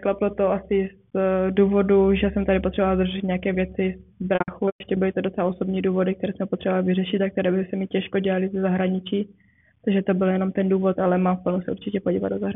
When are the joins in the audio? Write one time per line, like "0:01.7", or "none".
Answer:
none